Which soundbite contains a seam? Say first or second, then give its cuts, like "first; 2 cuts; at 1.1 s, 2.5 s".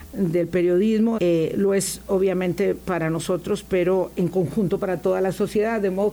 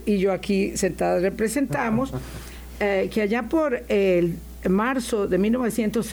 first; 1 cut; at 1.2 s